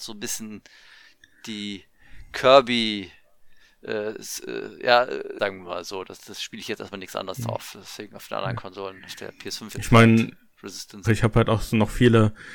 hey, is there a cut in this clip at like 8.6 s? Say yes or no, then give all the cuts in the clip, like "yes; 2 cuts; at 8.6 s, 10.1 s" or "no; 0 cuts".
no; 2 cuts; at 5.4 s, 11.0 s